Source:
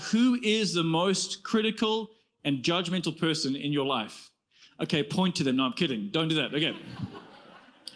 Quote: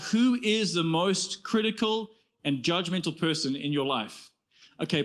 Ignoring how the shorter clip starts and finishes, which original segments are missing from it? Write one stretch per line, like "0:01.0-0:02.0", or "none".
none